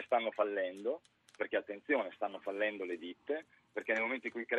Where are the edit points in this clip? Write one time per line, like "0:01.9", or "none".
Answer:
none